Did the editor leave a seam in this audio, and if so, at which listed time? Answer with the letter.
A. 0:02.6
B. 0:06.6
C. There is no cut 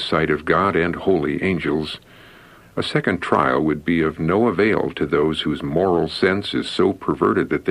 A